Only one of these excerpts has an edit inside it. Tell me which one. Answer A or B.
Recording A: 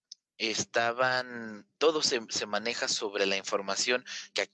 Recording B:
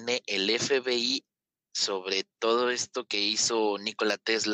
A